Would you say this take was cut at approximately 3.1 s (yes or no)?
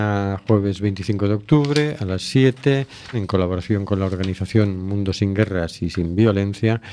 yes